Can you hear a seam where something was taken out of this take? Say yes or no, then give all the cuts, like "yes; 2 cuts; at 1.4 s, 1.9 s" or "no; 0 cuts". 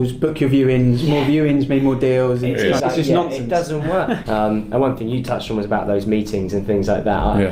yes; 2 cuts; at 2.8 s, 4.3 s